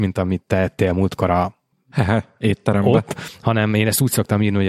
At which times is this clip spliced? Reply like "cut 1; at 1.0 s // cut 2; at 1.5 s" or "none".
none